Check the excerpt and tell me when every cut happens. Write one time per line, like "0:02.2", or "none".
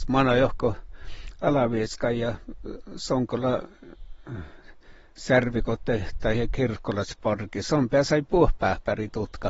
none